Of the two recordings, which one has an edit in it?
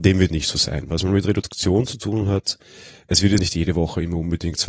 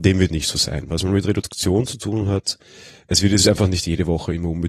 first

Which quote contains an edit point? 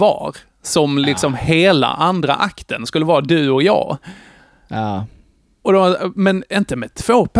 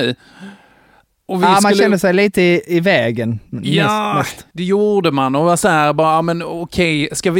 second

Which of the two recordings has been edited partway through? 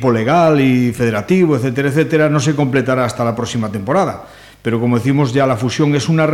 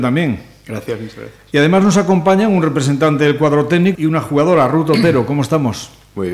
second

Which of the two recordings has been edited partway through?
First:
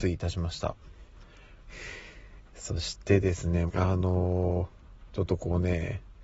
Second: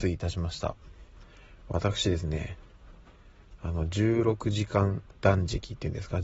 first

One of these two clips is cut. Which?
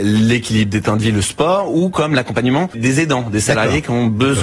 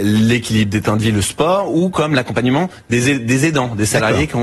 first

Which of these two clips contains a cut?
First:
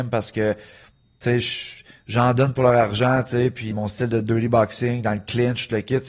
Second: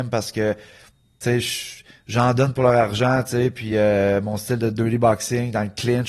first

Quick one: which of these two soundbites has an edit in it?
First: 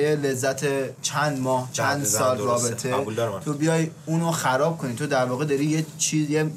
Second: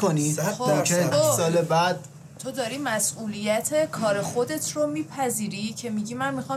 second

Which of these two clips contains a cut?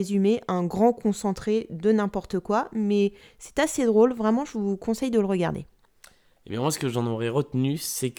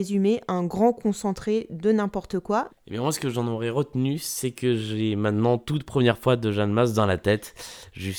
second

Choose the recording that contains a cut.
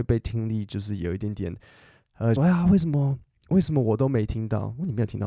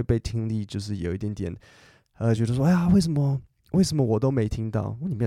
first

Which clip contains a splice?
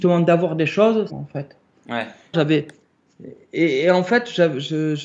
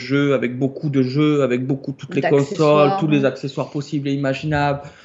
first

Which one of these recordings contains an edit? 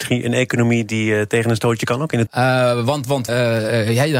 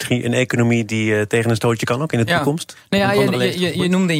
first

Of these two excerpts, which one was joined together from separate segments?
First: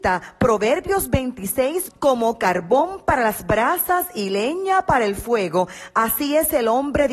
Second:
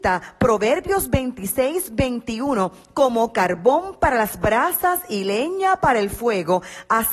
first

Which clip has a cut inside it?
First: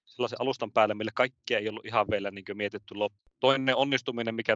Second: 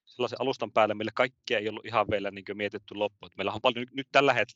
first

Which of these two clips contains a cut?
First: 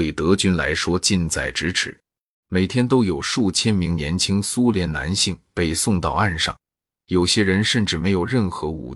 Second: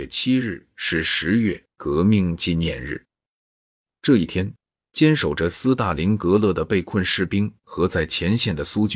first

